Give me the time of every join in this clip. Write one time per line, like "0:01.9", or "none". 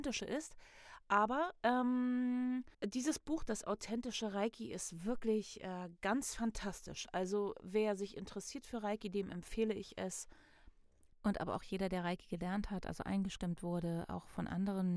0:02.7
0:11.1